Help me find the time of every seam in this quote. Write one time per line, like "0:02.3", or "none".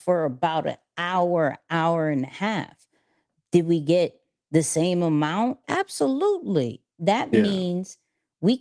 0:05.6